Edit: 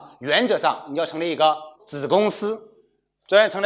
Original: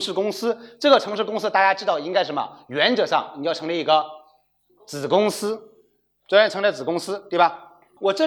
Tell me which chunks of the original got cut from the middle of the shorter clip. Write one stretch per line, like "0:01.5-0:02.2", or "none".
0:04.2-0:04.8